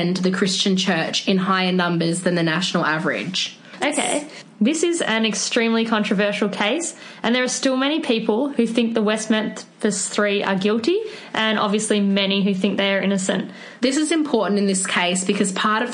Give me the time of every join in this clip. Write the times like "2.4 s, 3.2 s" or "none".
3.8 s, 13.8 s

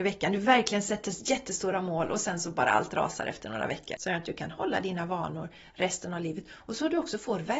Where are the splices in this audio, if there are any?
4.0 s

